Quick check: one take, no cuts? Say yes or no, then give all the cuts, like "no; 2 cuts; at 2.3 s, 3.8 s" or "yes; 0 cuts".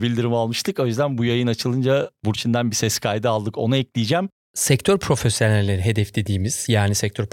no; 1 cut; at 4.4 s